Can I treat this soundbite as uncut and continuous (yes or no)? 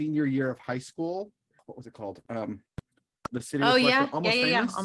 no